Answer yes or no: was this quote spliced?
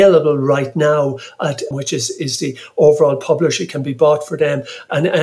yes